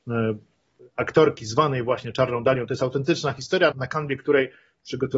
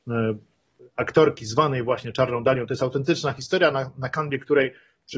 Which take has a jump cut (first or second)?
first